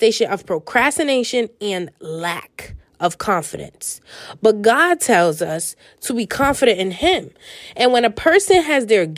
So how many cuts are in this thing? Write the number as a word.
one